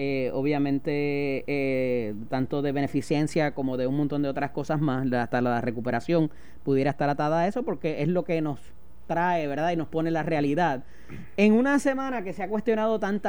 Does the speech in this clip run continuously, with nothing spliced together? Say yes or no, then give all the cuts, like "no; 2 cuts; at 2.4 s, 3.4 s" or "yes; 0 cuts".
yes; 0 cuts